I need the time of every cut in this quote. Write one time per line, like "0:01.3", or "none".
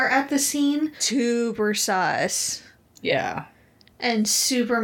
0:01.0